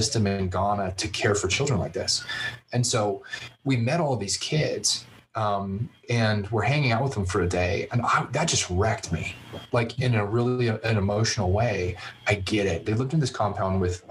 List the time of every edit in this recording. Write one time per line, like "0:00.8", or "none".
0:09.7
0:12.8